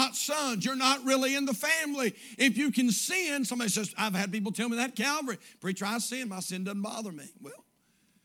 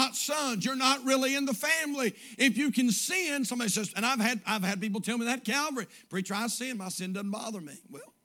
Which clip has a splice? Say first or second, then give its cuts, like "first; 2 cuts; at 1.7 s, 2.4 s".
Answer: first; 1 cut; at 3.9 s